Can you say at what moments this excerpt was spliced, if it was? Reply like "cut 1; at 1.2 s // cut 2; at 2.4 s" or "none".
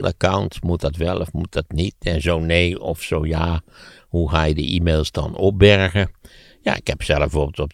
none